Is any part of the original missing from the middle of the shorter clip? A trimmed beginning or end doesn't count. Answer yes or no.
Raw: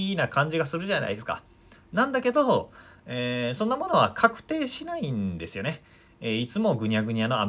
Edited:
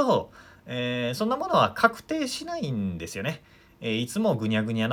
no